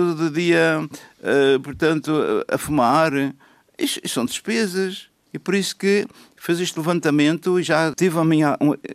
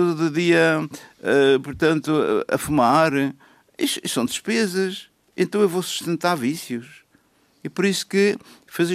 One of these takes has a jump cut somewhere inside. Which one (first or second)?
first